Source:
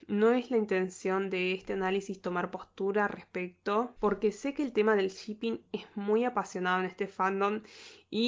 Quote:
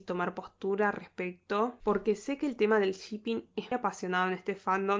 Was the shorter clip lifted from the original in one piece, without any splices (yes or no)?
no